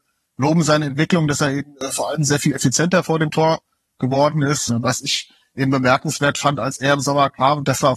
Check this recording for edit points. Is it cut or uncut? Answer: cut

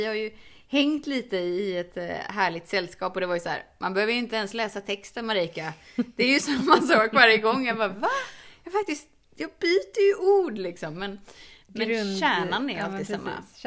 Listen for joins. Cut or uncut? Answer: uncut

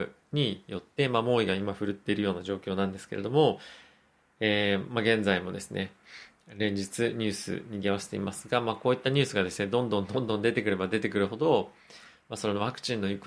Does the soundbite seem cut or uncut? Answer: uncut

